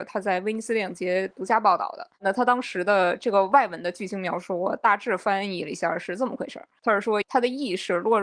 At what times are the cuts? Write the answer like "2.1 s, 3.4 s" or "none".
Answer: 7.2 s